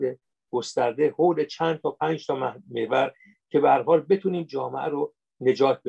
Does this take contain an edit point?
no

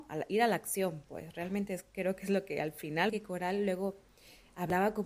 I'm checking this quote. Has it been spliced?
yes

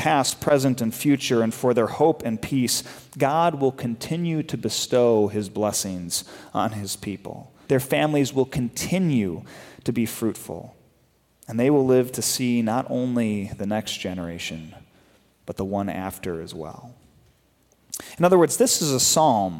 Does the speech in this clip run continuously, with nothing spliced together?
no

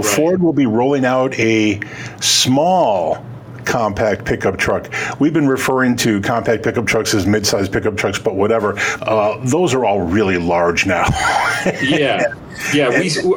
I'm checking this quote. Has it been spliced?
yes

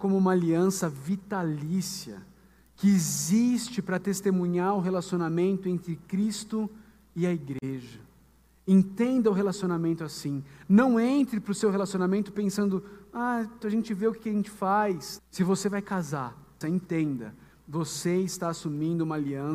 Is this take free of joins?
no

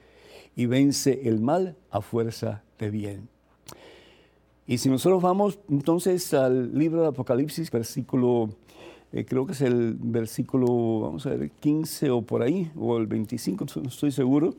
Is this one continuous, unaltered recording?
no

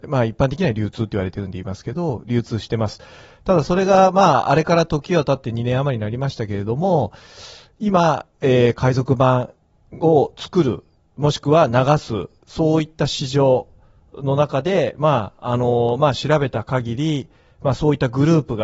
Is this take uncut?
yes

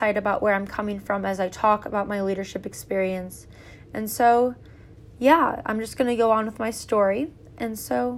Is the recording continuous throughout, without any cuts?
yes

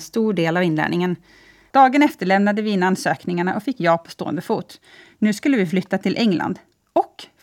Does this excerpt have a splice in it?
yes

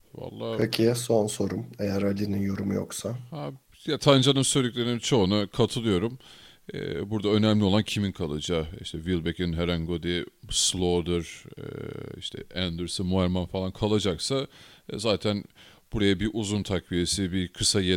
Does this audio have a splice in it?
no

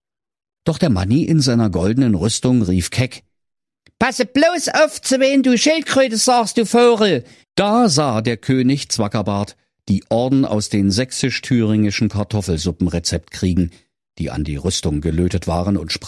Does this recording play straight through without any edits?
no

